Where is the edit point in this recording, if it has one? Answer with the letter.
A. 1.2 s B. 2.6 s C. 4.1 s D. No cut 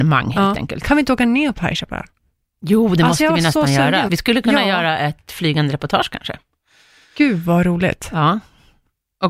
C